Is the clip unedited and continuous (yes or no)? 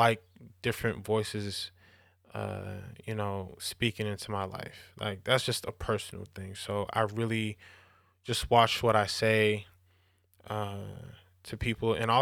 yes